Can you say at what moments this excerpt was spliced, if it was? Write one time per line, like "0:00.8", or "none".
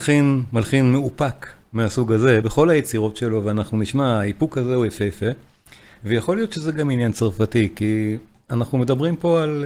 0:02.4